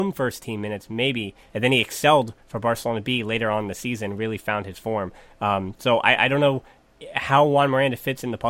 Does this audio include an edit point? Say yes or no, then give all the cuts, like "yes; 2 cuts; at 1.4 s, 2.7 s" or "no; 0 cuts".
yes; 1 cut; at 1.5 s